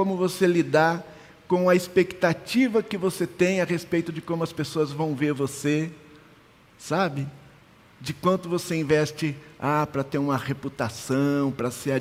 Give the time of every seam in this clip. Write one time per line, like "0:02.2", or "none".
none